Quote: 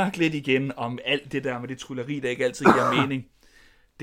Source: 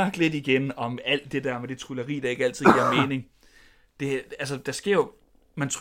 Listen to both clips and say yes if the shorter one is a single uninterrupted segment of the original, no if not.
yes